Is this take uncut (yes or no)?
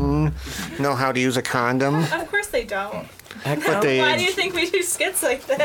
yes